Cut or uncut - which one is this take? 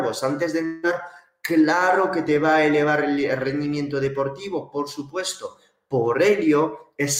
uncut